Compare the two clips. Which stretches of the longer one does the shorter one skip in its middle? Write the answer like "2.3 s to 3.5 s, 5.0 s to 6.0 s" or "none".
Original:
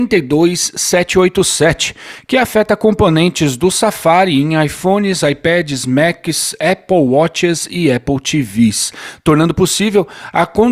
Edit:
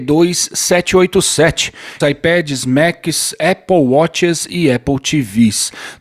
2.2 s to 5.2 s